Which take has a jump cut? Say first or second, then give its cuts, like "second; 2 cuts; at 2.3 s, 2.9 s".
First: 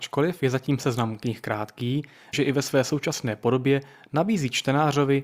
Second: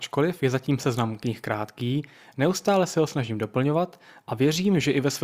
first; 1 cut; at 2.3 s